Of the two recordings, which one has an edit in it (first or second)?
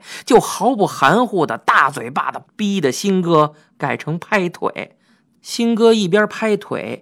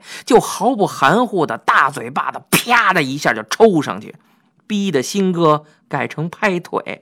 first